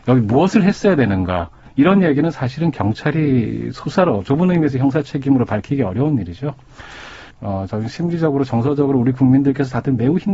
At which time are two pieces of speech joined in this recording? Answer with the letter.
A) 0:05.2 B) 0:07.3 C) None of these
B